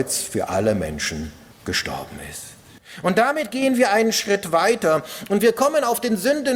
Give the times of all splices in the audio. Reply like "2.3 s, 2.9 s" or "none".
none